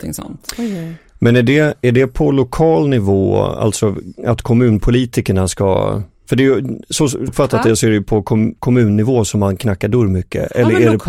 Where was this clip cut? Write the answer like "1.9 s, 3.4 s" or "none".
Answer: 7.3 s, 8.6 s